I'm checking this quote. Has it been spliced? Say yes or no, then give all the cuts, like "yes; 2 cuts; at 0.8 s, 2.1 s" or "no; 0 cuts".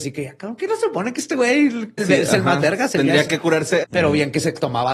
yes; 2 cuts; at 2.0 s, 3.8 s